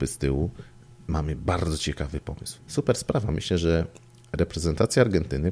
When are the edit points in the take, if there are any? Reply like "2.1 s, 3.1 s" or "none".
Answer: 2.6 s